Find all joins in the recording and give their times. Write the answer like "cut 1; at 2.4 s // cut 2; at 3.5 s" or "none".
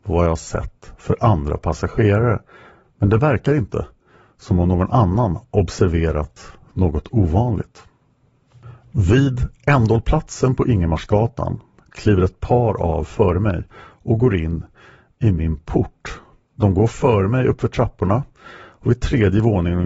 none